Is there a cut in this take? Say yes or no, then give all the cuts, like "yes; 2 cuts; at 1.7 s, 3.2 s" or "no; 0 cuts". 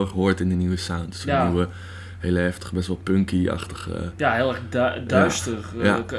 no; 0 cuts